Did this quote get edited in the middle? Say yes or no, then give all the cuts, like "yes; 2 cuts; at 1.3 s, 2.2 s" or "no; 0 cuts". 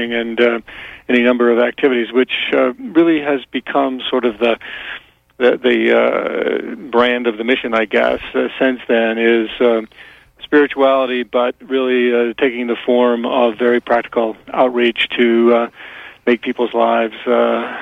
no; 0 cuts